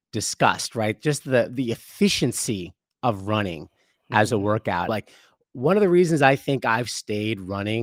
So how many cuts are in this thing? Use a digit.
1